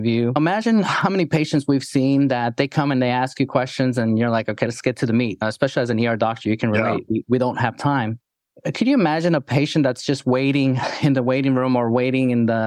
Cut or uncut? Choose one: uncut